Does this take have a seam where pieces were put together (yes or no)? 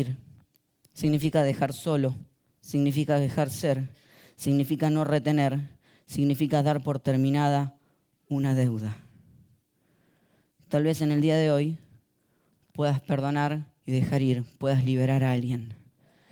yes